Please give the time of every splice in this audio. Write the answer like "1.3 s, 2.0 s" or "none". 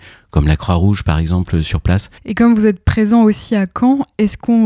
2.2 s